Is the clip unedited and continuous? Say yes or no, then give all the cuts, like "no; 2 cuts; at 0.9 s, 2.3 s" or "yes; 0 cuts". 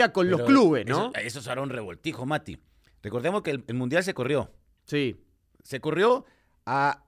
yes; 0 cuts